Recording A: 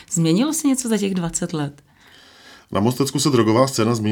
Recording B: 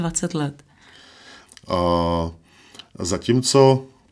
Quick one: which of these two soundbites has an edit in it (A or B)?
B